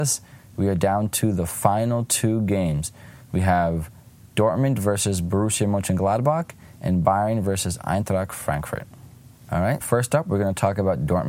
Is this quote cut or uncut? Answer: cut